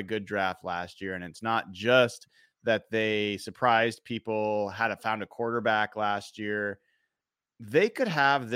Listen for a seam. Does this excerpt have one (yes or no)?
yes